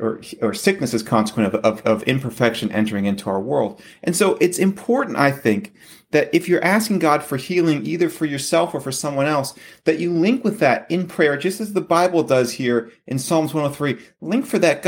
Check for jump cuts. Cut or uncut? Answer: uncut